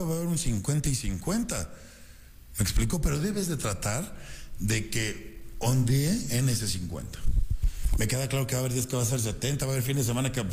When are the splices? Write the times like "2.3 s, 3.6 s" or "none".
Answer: none